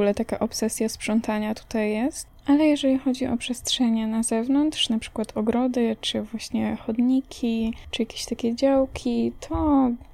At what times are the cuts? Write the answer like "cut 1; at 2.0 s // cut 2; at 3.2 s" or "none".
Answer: none